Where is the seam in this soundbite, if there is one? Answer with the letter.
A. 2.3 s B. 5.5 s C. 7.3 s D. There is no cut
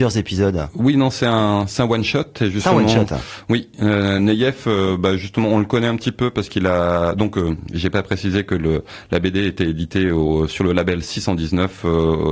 D